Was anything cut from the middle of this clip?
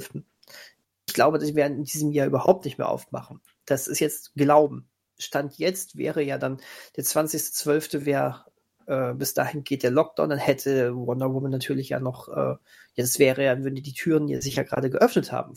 no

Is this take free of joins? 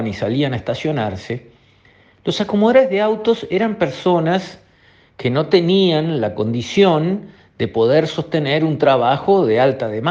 yes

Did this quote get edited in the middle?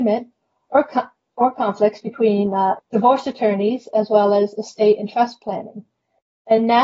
yes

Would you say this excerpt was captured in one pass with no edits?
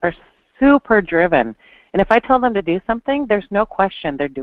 yes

